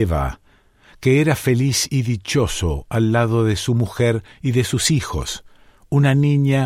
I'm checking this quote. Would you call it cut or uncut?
uncut